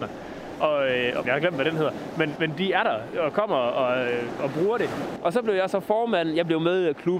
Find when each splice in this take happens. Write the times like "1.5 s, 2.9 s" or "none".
1.2 s, 2.4 s, 5.2 s